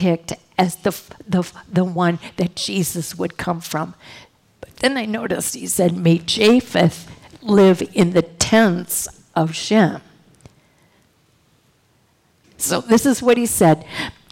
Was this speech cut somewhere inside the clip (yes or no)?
yes